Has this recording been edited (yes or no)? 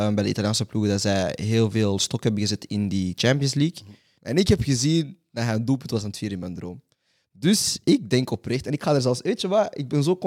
yes